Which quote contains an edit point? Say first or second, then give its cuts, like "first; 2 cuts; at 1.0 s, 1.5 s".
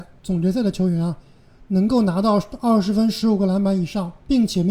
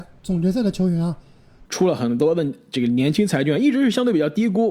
second; 1 cut; at 1.7 s